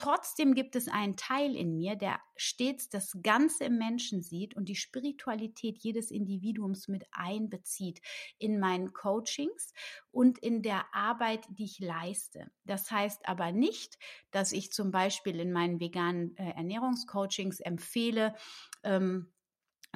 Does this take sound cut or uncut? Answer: uncut